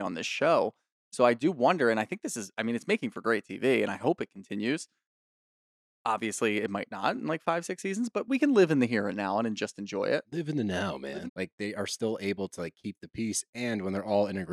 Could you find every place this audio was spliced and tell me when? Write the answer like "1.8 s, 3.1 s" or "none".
11.3 s